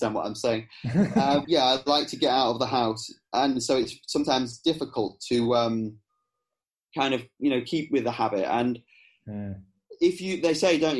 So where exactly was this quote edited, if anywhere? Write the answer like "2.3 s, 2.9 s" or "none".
1.4 s